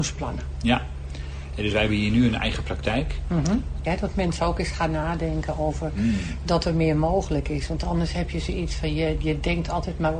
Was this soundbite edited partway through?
yes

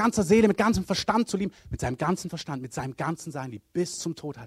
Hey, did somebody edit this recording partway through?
yes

